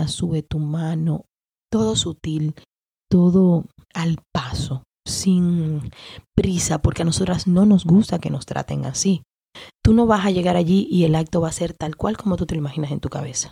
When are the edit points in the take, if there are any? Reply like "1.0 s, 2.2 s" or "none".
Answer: 9.7 s